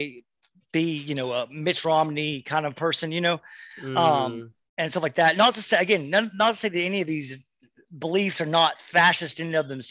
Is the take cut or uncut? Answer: uncut